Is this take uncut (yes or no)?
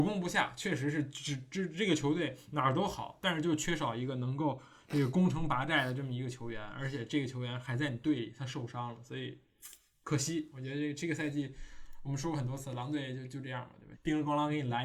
no